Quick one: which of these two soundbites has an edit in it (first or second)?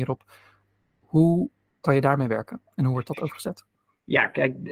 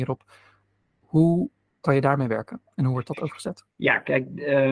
second